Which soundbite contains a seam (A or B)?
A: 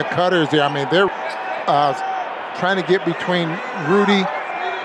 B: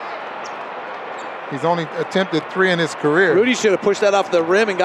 A